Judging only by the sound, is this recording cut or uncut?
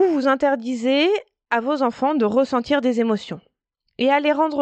uncut